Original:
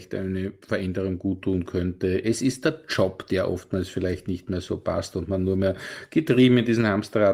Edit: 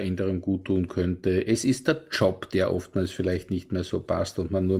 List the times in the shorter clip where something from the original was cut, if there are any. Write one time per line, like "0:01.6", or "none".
none